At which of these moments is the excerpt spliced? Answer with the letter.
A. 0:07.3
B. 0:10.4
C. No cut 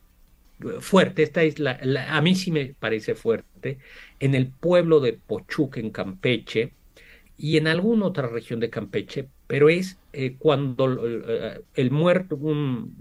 A